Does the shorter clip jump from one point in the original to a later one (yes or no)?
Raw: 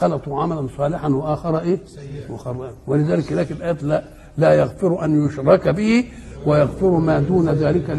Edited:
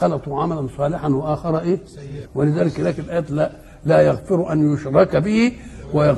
yes